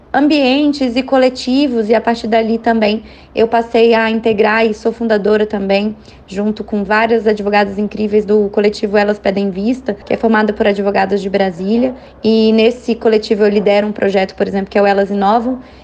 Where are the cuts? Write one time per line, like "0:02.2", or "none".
none

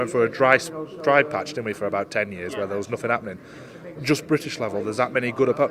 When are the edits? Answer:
0:04.0

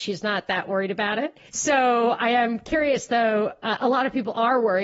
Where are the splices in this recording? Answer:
0:01.5

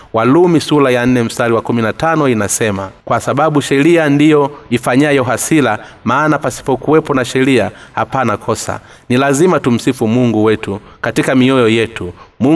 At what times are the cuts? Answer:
0:03.0

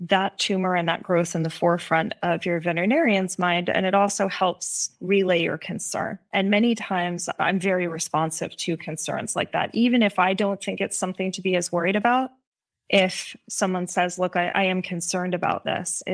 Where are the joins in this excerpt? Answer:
none

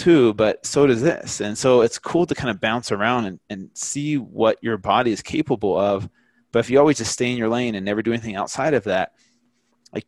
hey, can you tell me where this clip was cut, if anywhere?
none

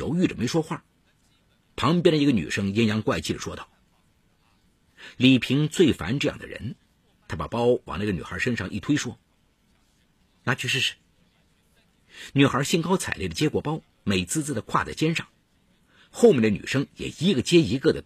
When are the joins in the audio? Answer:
0:01.6

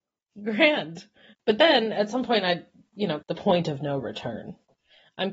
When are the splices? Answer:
0:01.3
0:03.2

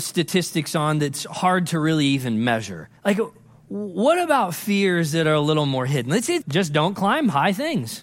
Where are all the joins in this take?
0:03.0
0:06.4

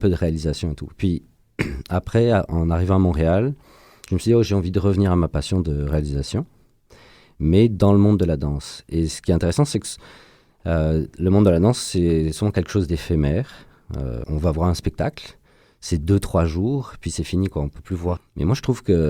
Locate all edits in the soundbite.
0:14.2
0:18.2

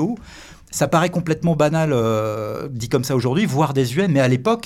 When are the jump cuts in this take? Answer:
none

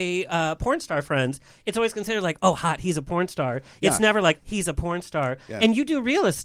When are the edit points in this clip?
0:04.4

